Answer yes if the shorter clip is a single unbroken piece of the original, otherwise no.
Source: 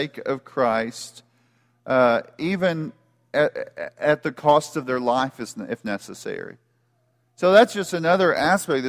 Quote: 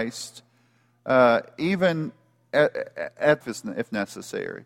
no